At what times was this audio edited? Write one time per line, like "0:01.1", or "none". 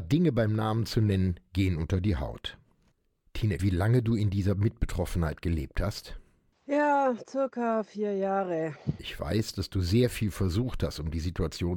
0:03.6
0:09.0